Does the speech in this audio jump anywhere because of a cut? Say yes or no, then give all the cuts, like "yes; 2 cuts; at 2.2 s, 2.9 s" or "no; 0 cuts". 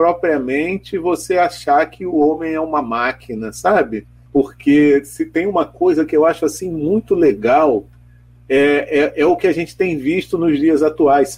yes; 1 cut; at 4.2 s